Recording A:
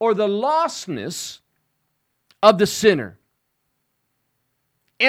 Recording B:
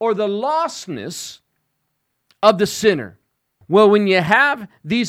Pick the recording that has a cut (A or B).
B